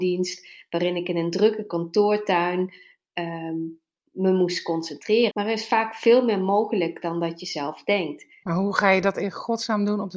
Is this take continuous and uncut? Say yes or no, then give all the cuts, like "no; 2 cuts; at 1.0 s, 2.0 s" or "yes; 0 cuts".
no; 2 cuts; at 5.3 s, 8.4 s